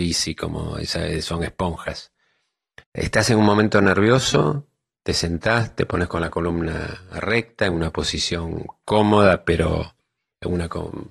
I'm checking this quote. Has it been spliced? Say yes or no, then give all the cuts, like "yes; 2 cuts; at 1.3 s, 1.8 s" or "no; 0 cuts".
yes; 1 cut; at 2.8 s